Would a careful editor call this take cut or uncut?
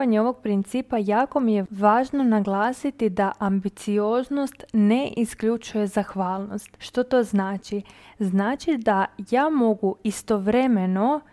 uncut